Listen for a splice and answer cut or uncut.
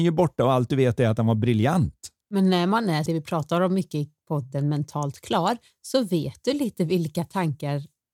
cut